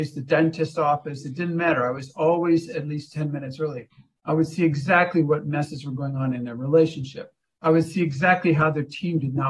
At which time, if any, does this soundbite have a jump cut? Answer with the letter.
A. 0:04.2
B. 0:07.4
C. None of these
A